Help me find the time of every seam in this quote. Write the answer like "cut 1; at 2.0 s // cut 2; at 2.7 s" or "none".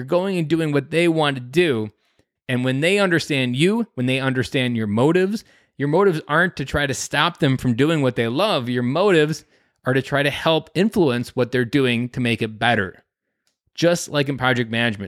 cut 1; at 2.4 s